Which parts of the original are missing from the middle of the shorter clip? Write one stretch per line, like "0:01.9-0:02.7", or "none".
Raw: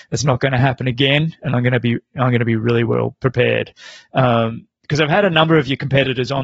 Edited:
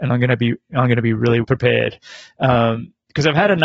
0:02.9-0:03.2